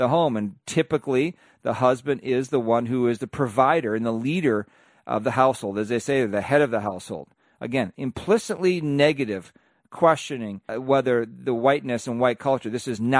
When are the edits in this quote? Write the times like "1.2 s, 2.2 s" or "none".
10.7 s